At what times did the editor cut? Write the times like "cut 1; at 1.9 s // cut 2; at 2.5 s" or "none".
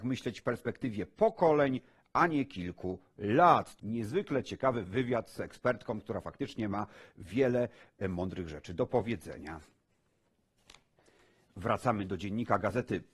cut 1; at 3.8 s